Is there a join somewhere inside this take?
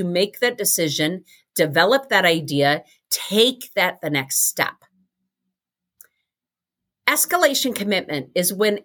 no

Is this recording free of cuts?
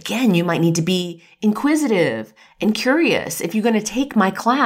yes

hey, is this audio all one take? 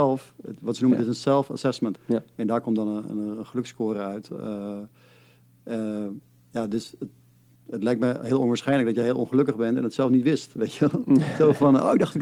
no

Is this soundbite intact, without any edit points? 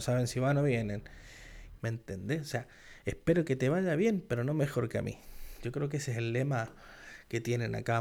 no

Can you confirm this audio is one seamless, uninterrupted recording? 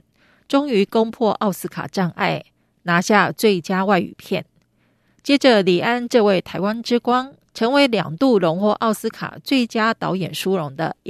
no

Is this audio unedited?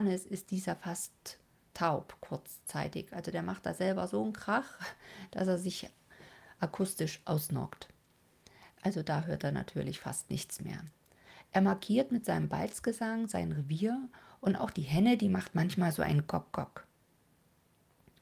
no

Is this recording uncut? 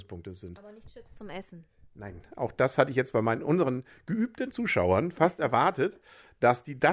yes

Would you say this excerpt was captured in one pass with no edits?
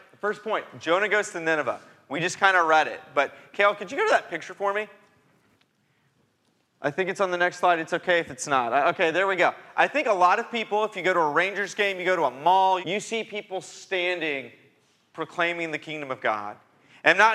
no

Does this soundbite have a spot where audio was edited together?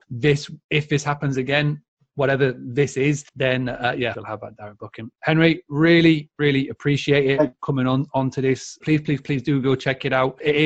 yes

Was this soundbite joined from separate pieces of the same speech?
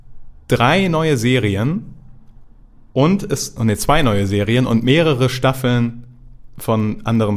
no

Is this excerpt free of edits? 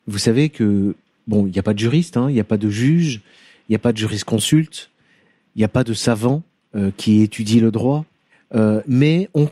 yes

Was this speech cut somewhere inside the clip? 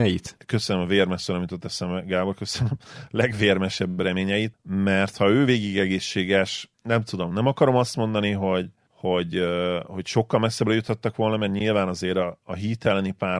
no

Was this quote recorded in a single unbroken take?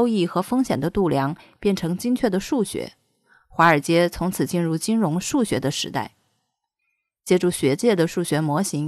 yes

